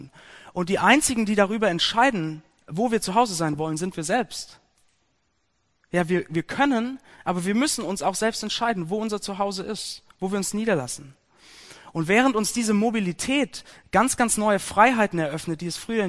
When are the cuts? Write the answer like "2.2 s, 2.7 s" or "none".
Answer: none